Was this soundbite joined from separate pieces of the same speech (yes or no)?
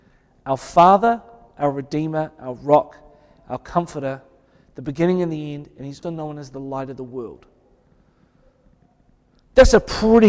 yes